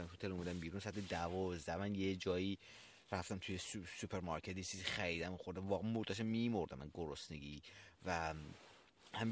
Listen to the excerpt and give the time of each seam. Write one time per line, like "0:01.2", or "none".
none